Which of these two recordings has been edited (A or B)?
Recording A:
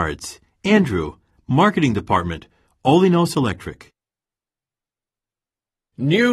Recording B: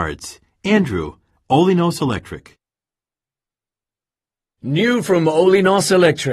B